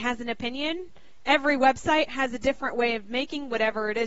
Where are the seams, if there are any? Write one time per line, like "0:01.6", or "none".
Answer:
none